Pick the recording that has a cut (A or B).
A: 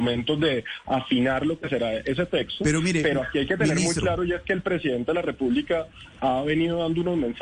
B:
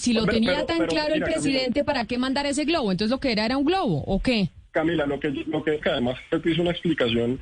B